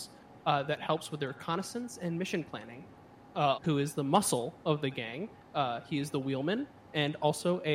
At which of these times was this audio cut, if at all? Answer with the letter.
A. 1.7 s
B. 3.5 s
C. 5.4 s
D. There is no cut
B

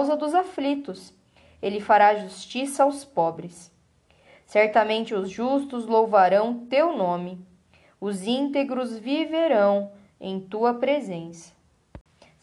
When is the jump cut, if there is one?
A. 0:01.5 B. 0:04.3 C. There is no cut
C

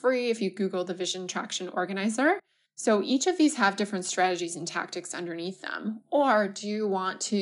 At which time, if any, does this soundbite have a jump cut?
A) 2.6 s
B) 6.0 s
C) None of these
A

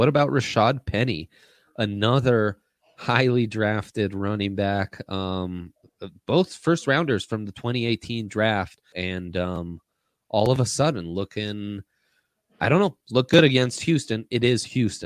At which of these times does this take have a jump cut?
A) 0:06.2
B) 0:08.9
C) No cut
B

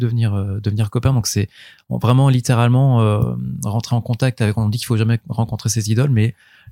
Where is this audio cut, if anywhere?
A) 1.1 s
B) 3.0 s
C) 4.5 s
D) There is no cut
D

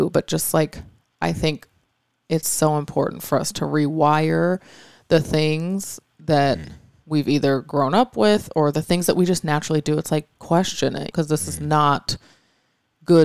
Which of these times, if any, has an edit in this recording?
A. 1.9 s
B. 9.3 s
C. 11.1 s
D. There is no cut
C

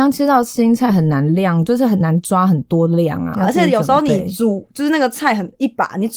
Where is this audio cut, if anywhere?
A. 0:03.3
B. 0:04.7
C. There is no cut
A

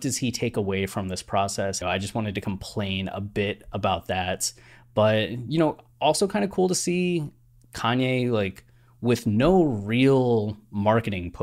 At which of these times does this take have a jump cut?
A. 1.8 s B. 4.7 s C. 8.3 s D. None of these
A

